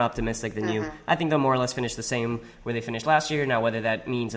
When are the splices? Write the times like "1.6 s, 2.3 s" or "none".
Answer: none